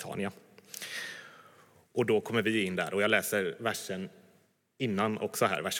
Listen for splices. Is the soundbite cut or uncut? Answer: uncut